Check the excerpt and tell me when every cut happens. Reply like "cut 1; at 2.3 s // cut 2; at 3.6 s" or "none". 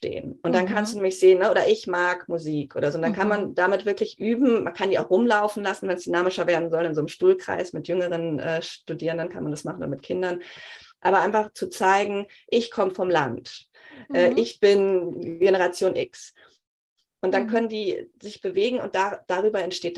none

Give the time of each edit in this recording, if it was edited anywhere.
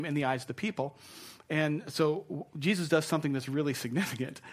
none

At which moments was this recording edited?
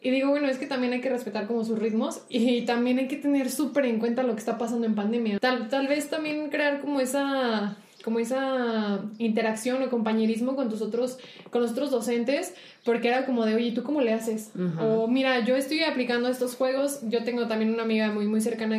cut 1; at 5.4 s

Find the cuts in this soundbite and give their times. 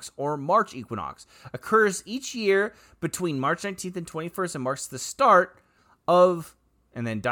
none

